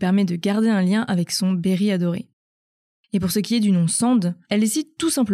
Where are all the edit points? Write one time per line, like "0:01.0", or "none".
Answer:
0:04.4